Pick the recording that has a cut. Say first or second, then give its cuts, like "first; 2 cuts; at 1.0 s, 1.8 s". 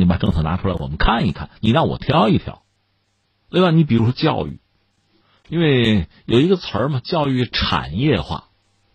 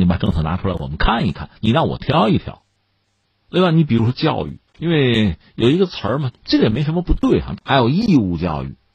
second; 3 cuts; at 4.7 s, 6.3 s, 7.6 s